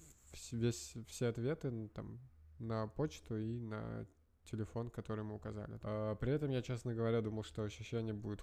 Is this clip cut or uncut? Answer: cut